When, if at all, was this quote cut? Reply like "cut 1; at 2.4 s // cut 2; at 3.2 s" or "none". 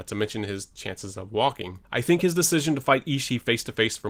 cut 1; at 1.9 s